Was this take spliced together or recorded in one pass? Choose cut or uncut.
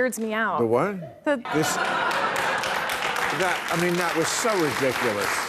cut